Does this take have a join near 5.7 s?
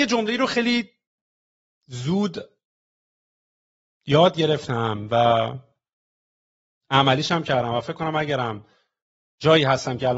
no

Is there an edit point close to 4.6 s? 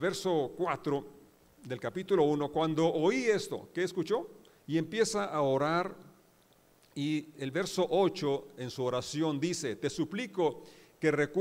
yes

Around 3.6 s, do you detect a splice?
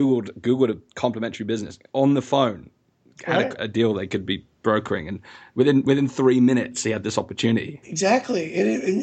yes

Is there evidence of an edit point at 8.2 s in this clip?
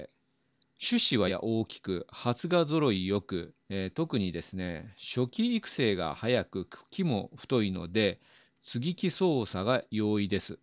no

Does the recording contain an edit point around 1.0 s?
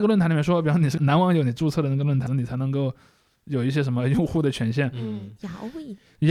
yes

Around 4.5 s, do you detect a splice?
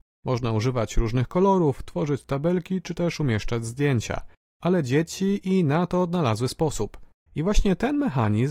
yes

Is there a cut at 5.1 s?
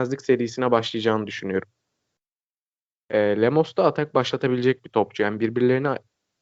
no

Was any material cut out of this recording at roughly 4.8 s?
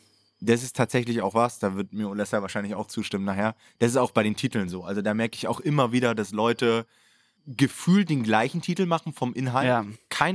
no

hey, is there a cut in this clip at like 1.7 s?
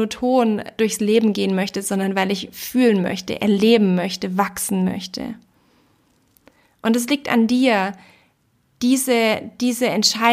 no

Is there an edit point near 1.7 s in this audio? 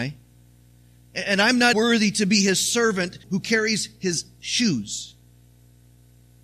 yes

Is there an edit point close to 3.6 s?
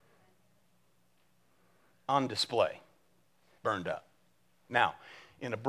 yes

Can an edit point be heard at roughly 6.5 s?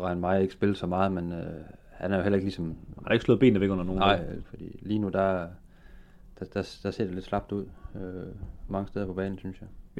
no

